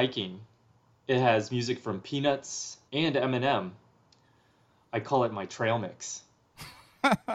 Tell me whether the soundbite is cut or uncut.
cut